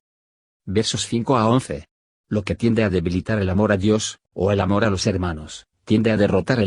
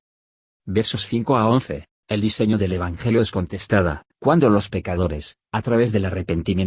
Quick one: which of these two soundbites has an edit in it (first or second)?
second